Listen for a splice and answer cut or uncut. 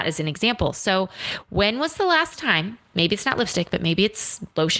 uncut